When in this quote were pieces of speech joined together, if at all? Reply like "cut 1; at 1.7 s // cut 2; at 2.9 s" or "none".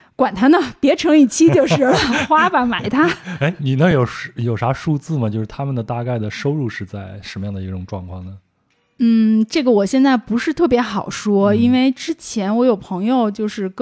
none